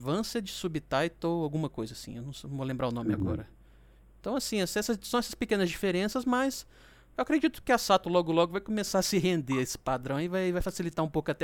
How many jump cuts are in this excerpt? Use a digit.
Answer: 0